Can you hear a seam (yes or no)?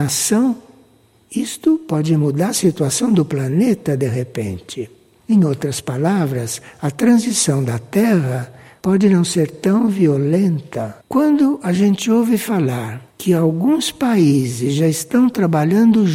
yes